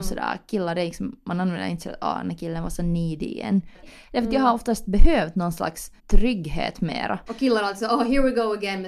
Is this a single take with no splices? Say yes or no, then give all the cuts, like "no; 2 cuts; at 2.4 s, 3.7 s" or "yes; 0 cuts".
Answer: no; 3 cuts; at 3.8 s, 6.0 s, 7.3 s